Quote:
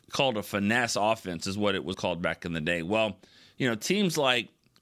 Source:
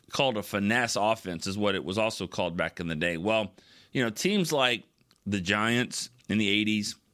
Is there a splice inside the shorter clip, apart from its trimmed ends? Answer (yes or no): yes